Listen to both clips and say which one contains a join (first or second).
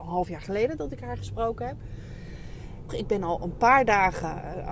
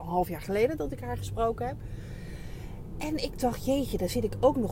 first